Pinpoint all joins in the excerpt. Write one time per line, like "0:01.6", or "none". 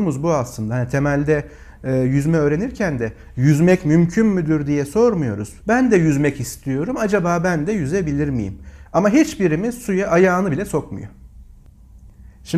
0:05.6
0:08.9